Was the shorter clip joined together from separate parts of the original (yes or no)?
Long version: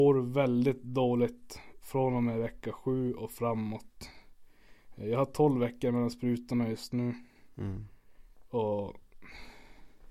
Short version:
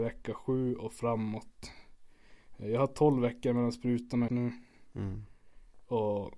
yes